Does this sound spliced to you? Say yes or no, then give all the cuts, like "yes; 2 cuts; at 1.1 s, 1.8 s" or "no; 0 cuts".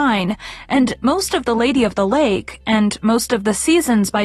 no; 0 cuts